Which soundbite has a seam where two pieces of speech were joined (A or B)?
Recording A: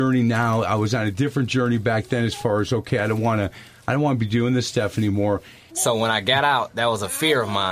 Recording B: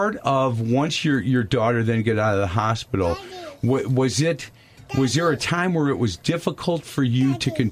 A